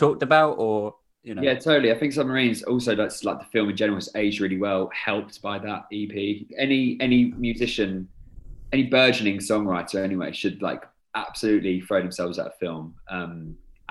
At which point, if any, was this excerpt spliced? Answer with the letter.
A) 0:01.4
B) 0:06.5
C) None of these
B